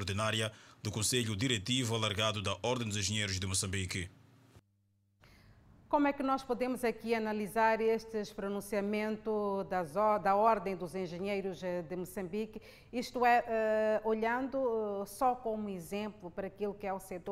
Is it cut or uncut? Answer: uncut